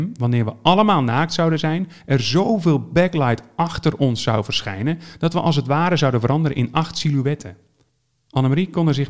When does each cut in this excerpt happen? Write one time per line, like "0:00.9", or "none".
none